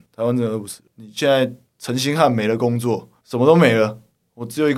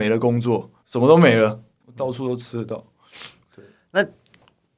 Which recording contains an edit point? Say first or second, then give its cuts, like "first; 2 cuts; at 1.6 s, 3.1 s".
second; 2 cuts; at 1.8 s, 3.4 s